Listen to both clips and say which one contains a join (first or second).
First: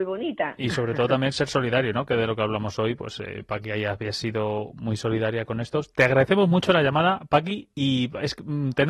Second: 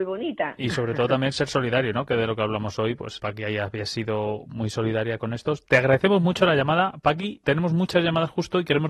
second